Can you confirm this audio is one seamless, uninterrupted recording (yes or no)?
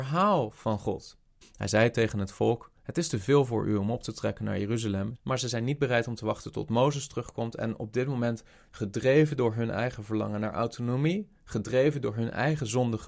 no